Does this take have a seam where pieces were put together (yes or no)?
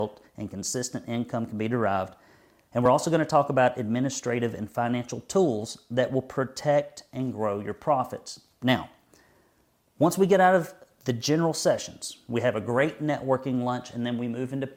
no